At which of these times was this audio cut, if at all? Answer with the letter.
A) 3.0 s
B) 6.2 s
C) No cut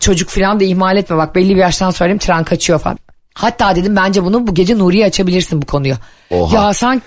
A